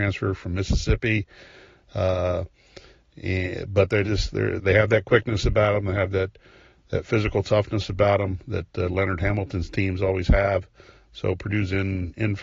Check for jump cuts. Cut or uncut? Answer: cut